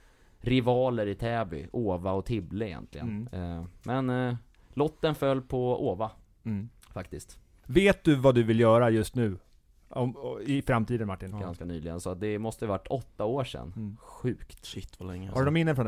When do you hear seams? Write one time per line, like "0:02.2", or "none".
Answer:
0:11.3